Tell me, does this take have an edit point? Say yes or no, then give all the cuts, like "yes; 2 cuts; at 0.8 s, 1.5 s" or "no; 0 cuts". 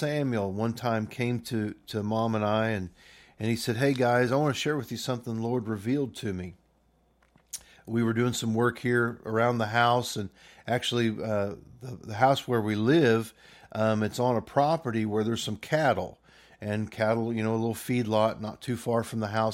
no; 0 cuts